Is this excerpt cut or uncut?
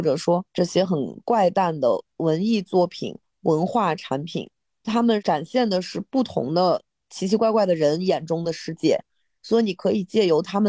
uncut